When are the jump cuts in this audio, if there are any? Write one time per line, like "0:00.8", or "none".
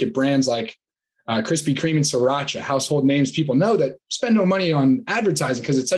none